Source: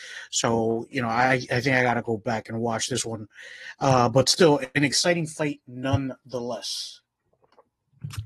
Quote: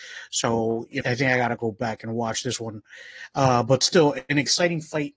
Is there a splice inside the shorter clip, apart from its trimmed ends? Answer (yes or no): yes